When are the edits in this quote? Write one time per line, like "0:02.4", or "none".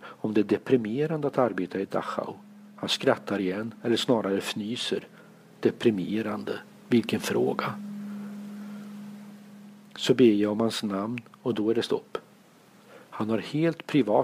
none